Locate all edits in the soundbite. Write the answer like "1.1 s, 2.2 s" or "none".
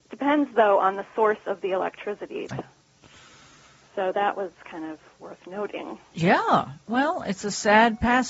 2.5 s